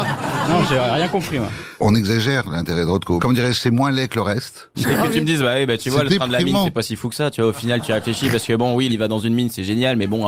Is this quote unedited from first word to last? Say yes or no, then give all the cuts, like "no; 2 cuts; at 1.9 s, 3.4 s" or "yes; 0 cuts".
no; 3 cuts; at 3.2 s, 4.7 s, 8.9 s